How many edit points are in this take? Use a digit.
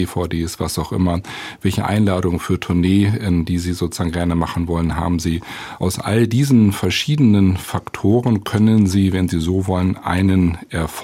0